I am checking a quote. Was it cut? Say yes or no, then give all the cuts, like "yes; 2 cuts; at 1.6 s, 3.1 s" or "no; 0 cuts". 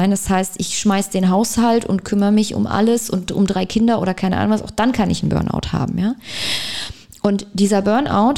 no; 0 cuts